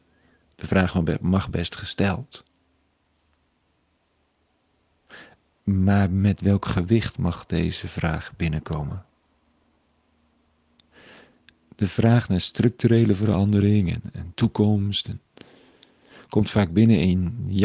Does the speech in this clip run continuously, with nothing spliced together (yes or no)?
no